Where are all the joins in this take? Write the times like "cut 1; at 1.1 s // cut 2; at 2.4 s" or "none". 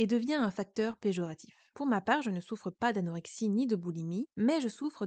none